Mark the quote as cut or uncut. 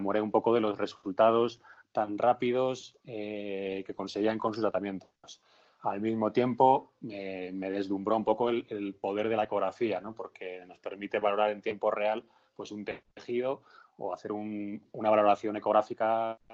uncut